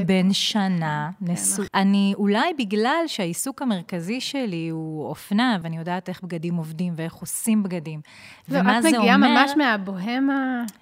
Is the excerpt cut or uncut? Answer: cut